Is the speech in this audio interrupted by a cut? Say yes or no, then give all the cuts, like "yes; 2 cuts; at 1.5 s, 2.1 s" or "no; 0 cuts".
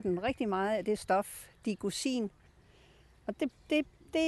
no; 0 cuts